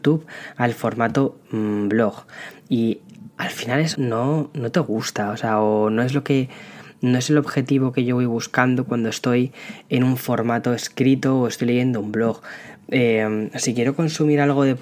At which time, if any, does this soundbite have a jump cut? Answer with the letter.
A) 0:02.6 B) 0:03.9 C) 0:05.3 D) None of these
B